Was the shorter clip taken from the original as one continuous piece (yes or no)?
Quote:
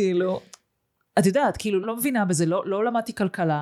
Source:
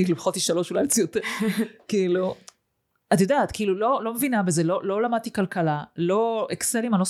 no